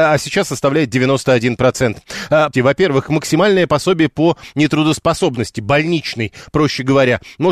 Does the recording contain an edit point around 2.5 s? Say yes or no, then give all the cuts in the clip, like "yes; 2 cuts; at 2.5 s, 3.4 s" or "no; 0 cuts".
yes; 1 cut; at 2.5 s